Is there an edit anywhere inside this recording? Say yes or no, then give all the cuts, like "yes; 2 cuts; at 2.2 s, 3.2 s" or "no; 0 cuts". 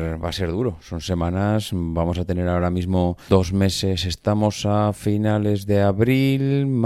yes; 1 cut; at 3.3 s